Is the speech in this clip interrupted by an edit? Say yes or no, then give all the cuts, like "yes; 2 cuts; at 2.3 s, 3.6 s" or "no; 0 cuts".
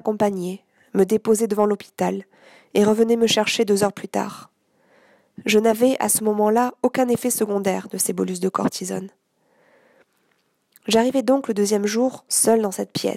no; 0 cuts